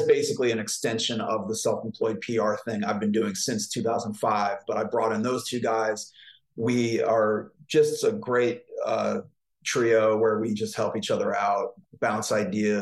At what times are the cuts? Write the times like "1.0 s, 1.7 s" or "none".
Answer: none